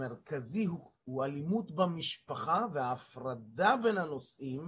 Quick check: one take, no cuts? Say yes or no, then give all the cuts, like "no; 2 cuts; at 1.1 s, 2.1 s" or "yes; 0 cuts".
yes; 0 cuts